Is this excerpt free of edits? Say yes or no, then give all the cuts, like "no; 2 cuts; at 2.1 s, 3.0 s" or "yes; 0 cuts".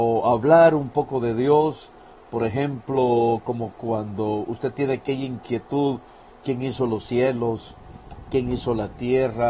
yes; 0 cuts